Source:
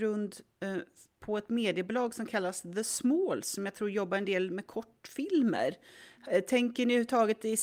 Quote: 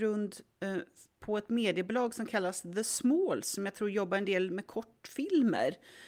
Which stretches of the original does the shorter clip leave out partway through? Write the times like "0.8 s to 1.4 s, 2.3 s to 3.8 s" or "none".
none